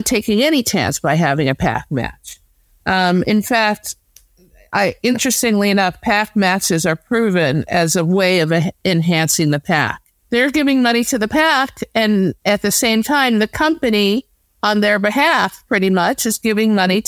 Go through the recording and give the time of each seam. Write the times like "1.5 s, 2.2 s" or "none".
10.2 s